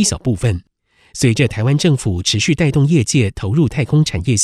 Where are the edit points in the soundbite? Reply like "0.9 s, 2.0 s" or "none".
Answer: none